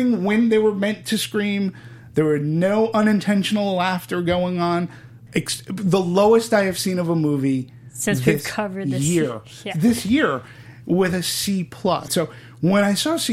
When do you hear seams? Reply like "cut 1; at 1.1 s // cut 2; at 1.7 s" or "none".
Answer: cut 1; at 5.3 s // cut 2; at 12.1 s